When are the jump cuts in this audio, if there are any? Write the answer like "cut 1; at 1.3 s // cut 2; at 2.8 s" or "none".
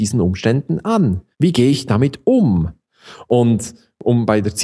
cut 1; at 1.3 s